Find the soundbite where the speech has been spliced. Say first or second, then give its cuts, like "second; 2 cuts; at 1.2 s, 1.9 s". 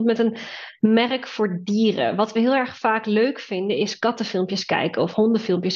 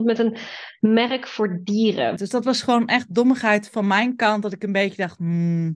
second; 1 cut; at 2.2 s